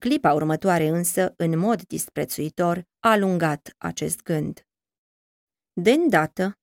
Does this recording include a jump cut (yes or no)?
no